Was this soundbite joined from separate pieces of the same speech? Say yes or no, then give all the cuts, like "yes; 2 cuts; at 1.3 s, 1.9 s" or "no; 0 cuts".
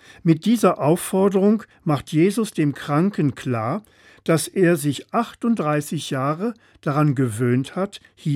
no; 0 cuts